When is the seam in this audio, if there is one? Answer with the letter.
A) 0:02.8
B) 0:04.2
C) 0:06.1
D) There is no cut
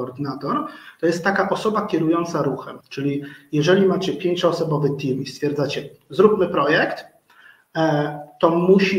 A